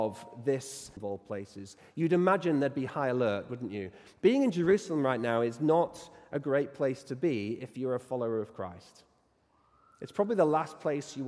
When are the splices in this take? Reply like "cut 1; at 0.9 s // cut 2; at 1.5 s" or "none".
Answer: cut 1; at 1.0 s